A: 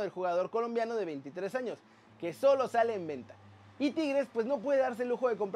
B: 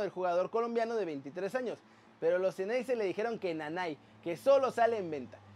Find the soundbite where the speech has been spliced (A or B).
A